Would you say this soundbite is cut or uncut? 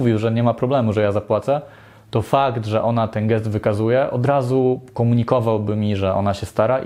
uncut